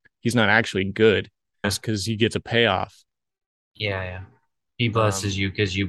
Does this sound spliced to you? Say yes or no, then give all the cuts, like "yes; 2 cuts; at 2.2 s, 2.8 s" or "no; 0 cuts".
yes; 1 cut; at 1.6 s